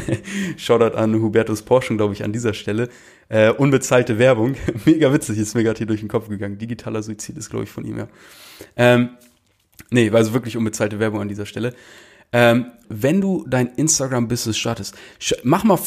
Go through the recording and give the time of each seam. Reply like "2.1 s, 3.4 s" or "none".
12.8 s